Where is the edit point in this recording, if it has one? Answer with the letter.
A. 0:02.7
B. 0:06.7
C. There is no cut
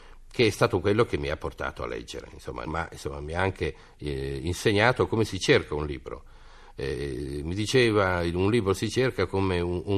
A